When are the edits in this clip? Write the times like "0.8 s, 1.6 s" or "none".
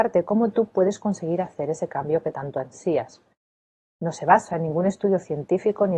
none